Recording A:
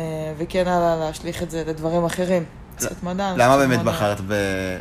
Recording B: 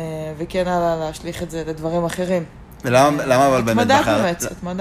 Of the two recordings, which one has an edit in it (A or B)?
A